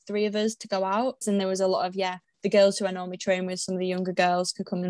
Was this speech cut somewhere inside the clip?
yes; 1 cut; at 1.2 s

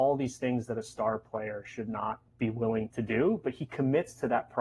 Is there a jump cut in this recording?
yes; 1 cut; at 2.3 s

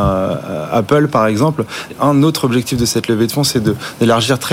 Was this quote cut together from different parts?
yes; 1 cut; at 1.9 s

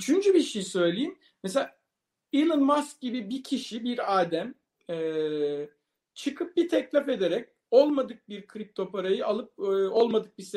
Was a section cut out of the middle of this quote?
no; 0 cuts

